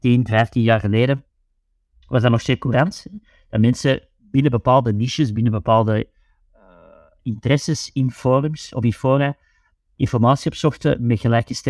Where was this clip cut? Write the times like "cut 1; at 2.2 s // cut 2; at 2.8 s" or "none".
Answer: none